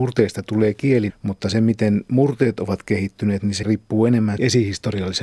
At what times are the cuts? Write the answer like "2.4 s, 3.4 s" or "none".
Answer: 1.1 s